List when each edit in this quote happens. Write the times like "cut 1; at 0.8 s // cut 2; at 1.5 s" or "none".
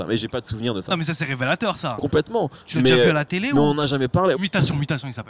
cut 1; at 2.0 s // cut 2; at 4.3 s

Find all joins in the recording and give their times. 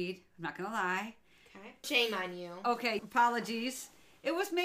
cut 1; at 1.8 s // cut 2; at 3.0 s

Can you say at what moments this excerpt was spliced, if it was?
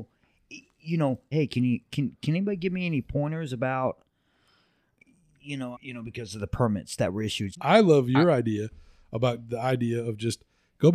cut 1; at 1.3 s // cut 2; at 5.7 s // cut 3; at 7.5 s

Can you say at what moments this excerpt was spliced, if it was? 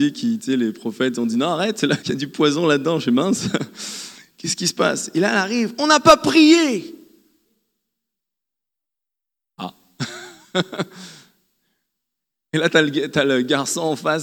cut 1; at 2.0 s

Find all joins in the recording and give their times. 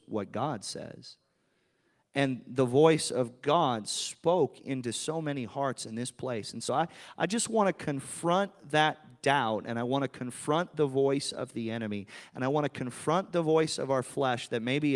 none

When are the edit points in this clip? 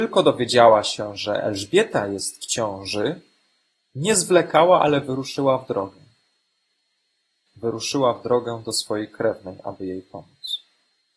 cut 1; at 7.5 s

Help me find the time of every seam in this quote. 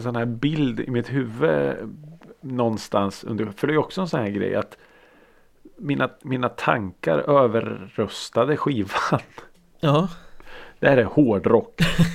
cut 1; at 10.4 s

